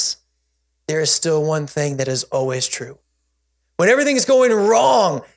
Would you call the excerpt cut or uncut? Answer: uncut